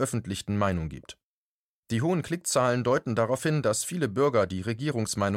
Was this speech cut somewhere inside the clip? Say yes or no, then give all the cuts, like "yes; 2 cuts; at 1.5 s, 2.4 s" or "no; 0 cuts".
no; 0 cuts